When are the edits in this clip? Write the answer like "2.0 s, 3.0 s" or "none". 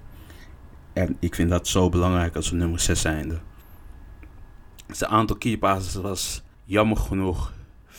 6.5 s